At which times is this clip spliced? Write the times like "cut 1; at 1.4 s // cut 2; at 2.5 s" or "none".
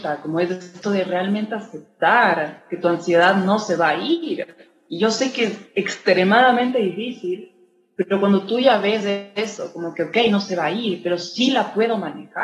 none